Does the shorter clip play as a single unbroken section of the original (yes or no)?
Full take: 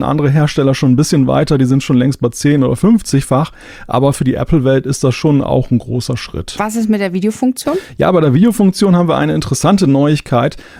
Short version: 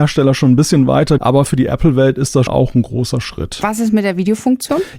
no